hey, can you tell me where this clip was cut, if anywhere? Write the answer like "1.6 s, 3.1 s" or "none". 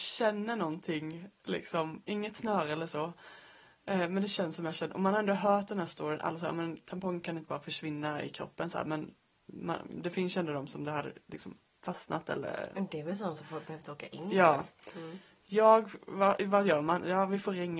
none

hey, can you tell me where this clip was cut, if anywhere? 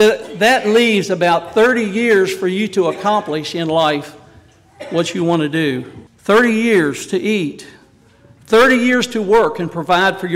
6.1 s

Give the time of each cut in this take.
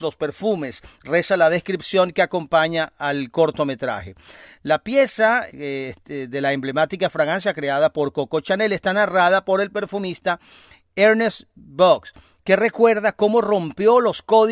5.5 s

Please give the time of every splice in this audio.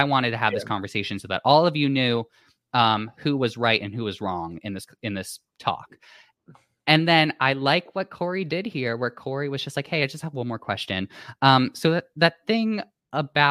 none

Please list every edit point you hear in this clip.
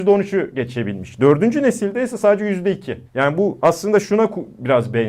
3.1 s

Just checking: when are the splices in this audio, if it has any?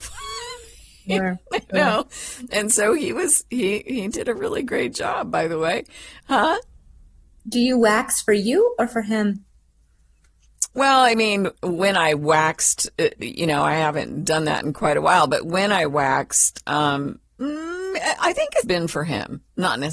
6.2 s, 10.7 s, 18.6 s

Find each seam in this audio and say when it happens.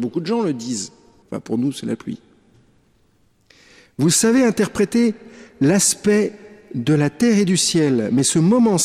1.2 s

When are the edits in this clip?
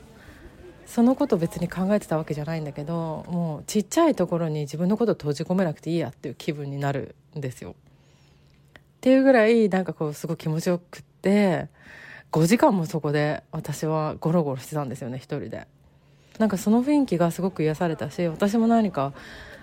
16.4 s

